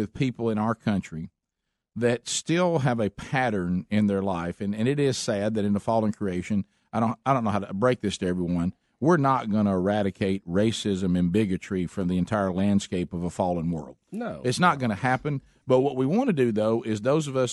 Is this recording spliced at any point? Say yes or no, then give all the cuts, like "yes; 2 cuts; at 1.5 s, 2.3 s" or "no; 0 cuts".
no; 0 cuts